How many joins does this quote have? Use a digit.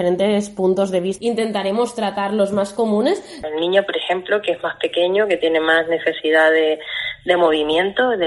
2